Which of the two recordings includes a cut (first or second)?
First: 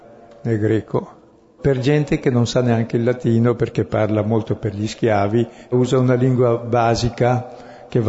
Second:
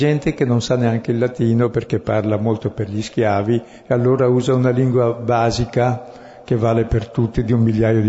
first